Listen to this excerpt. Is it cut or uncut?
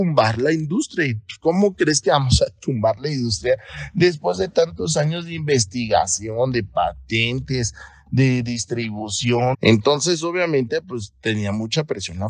cut